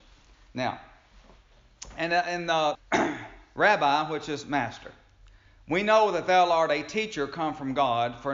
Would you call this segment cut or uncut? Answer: cut